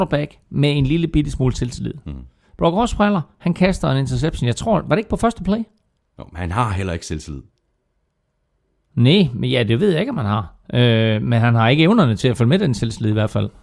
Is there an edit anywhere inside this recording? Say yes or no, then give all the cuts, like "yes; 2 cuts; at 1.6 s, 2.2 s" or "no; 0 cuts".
no; 0 cuts